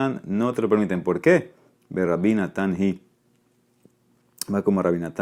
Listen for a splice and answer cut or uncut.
uncut